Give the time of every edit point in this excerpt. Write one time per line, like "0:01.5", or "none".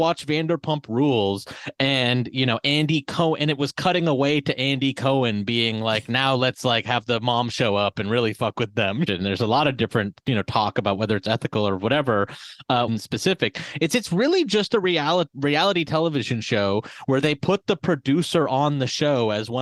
0:09.1
0:12.9